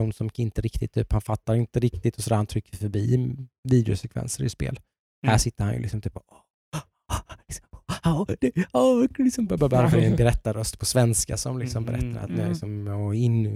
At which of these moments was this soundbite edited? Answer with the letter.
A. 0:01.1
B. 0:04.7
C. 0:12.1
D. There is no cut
D